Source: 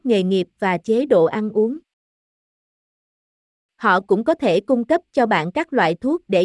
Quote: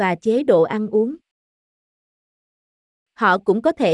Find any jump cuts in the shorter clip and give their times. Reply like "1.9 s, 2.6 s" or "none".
none